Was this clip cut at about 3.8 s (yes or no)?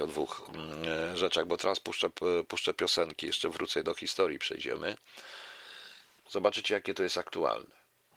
yes